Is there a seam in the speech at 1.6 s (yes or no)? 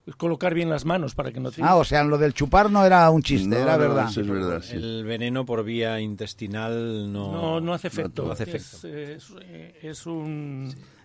yes